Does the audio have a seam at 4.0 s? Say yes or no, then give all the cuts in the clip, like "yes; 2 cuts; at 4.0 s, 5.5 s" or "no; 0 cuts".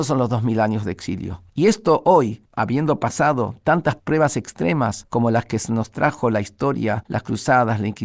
yes; 1 cut; at 4.0 s